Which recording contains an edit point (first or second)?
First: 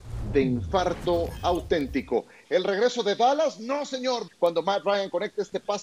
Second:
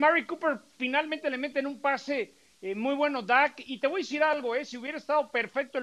first